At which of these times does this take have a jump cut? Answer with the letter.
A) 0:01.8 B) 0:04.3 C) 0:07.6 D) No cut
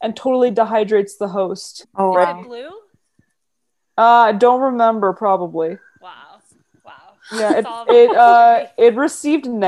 A